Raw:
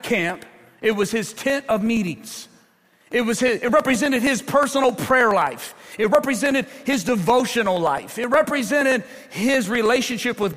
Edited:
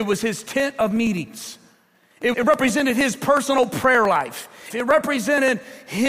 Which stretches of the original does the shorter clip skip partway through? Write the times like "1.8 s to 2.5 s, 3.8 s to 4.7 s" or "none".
3.2 s to 3.6 s, 6.0 s to 8.1 s

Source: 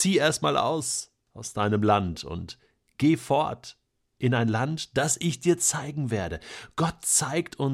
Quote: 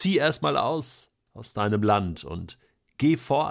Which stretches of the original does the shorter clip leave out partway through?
none

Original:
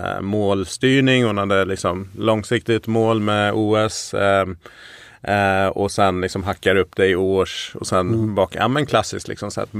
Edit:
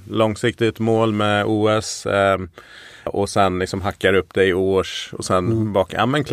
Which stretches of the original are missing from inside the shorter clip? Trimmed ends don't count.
5.1 s to 5.7 s

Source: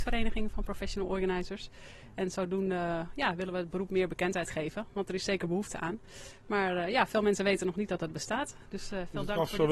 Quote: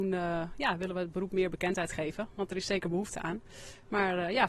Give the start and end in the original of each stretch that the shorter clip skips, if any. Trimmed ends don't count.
none

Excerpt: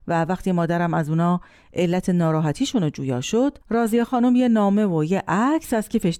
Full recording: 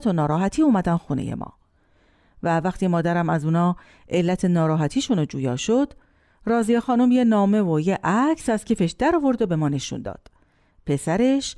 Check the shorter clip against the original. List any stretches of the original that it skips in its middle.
6.0 s to 6.4 s

